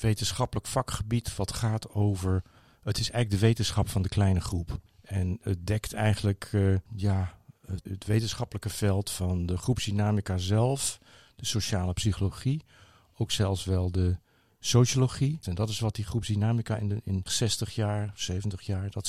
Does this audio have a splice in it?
yes; 3 cuts; at 7.9 s, 15.4 s, 17.3 s

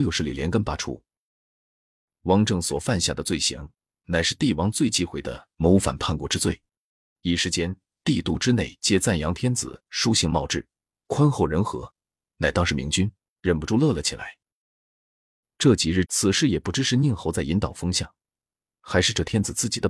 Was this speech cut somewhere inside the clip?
yes; 3 cuts; at 7.1 s, 13.4 s, 16.0 s

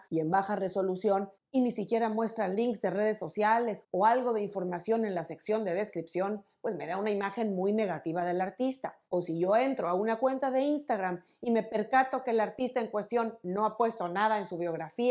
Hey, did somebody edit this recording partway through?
yes; 1 cut; at 9.1 s

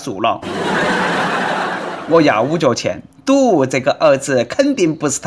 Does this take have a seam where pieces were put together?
no; 0 cuts

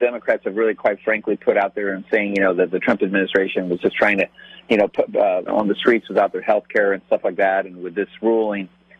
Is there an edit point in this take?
yes; 1 cut; at 5.5 s

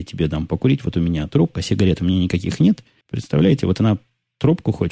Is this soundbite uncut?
no; 1 cut; at 3.0 s

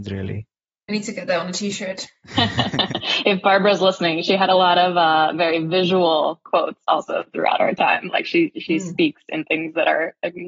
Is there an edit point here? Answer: no; 0 cuts

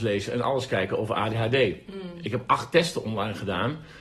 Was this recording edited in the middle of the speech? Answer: no; 0 cuts

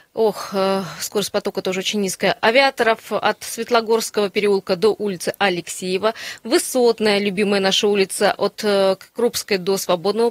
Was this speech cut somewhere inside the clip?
no; 0 cuts

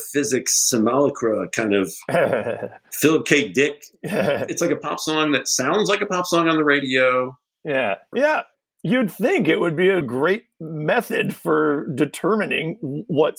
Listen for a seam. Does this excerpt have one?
yes; 2 cuts; at 8.1 s, 10.0 s

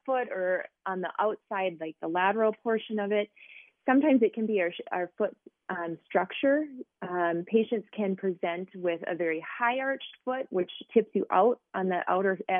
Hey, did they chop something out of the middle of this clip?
no; 0 cuts

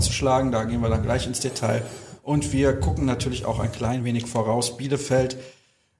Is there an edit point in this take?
no; 0 cuts

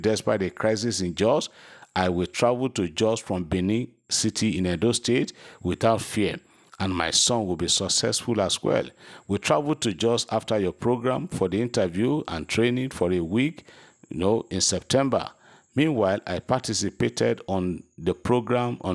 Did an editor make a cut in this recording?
no; 0 cuts

